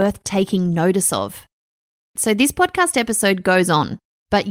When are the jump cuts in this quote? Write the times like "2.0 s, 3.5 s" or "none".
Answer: 2.2 s